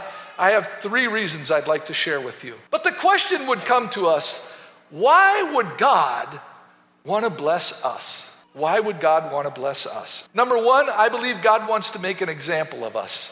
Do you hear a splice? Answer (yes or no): yes